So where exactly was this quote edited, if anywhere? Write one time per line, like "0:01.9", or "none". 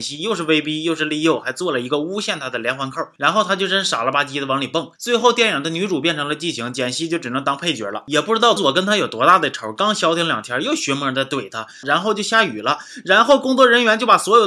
0:08.6
0:11.8